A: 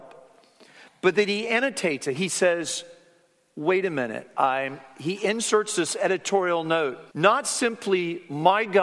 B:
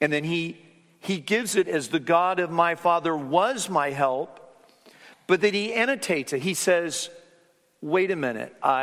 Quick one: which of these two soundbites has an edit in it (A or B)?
A